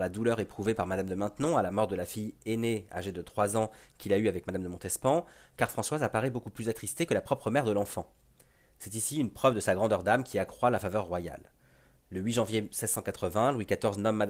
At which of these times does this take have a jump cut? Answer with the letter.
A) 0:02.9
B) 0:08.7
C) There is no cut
B